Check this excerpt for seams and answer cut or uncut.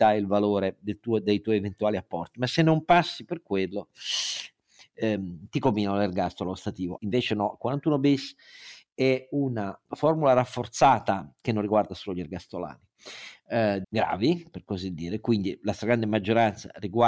cut